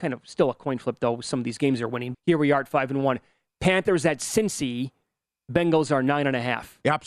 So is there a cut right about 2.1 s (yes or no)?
yes